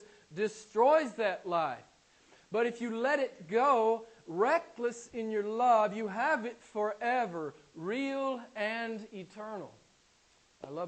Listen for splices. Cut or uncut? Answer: uncut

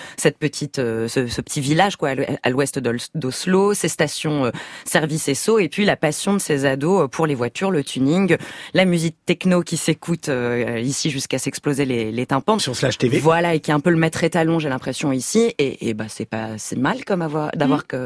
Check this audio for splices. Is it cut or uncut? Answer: cut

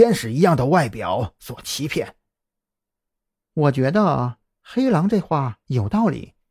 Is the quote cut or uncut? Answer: uncut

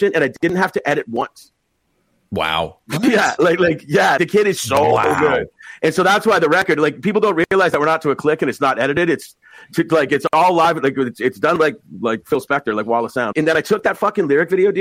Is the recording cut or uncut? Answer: cut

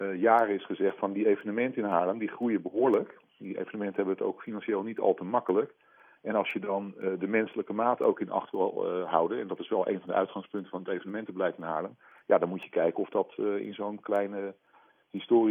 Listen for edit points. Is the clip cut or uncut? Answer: uncut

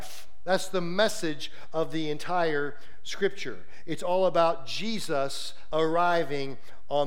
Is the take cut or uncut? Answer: cut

